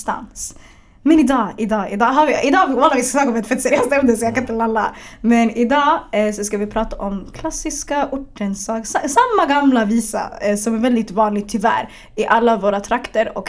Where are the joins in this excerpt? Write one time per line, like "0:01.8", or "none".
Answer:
none